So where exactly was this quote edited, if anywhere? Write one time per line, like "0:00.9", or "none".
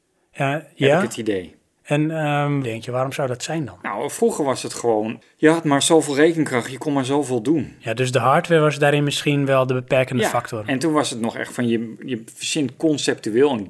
0:02.6